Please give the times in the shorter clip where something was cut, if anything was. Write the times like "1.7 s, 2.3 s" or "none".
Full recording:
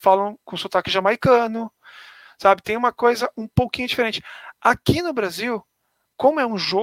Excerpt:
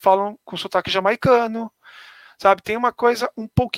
none